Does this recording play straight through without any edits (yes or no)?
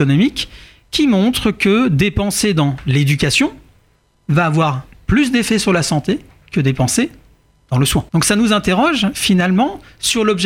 no